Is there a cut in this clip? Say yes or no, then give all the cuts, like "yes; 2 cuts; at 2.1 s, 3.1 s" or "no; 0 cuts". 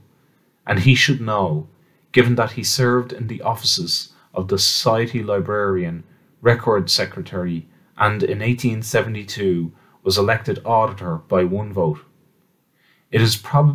no; 0 cuts